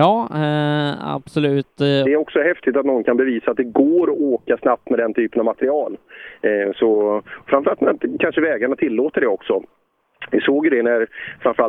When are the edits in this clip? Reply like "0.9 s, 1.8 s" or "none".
2.1 s